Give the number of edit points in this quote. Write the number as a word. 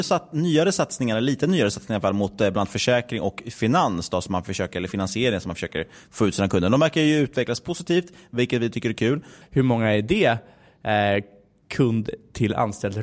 one